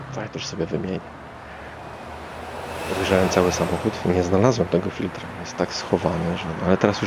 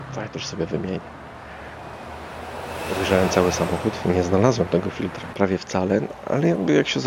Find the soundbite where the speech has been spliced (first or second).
second